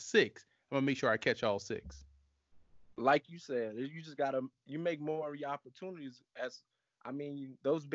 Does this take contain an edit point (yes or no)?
no